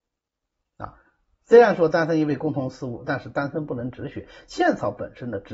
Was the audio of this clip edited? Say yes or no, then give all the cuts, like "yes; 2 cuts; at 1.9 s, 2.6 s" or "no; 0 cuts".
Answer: no; 0 cuts